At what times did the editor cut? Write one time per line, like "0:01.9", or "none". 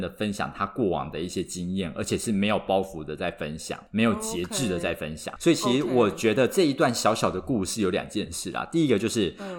0:03.9
0:05.4